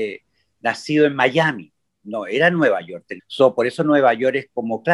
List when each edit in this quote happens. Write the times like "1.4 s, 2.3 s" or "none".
3.2 s